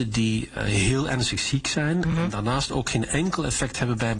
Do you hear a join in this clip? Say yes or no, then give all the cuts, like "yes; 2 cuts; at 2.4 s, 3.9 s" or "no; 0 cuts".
no; 0 cuts